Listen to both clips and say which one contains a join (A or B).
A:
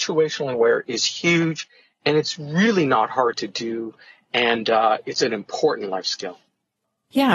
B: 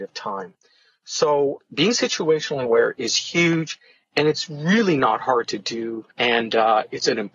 B